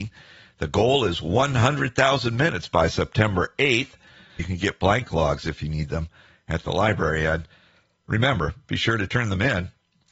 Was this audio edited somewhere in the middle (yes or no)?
yes